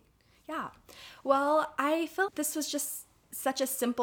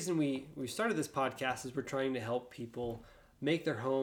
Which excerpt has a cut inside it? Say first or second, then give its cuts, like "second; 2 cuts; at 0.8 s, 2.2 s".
first; 1 cut; at 2.3 s